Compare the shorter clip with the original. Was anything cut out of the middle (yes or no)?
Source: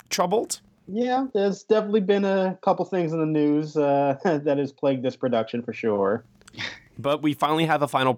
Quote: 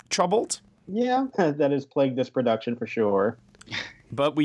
yes